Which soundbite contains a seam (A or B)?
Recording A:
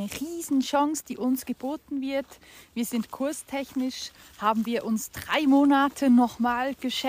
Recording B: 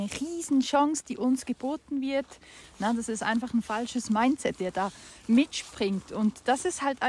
B